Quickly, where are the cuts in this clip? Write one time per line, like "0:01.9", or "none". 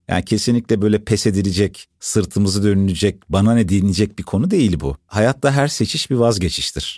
none